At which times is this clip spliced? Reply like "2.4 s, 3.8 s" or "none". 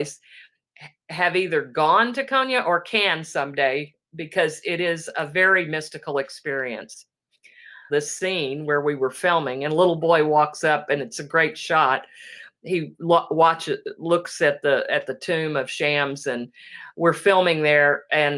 7.9 s